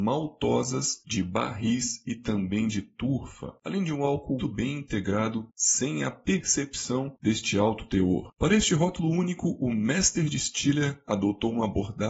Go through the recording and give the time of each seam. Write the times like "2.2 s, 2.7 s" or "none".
4.4 s, 8.3 s